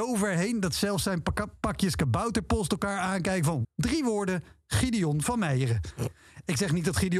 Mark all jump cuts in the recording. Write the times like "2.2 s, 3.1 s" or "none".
3.6 s